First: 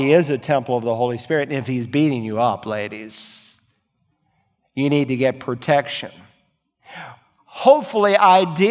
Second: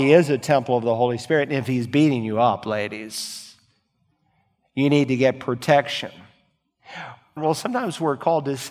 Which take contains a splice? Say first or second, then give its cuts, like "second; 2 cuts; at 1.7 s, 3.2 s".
second; 1 cut; at 7.4 s